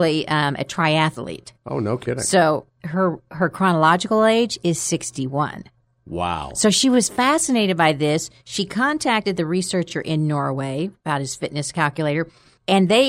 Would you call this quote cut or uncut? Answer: uncut